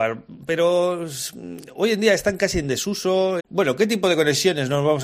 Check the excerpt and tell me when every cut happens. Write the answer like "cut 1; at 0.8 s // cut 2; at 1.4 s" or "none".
cut 1; at 3.4 s